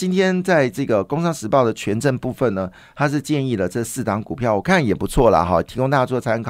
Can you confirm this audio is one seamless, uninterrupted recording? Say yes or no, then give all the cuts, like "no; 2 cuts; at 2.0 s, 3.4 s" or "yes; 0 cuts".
yes; 0 cuts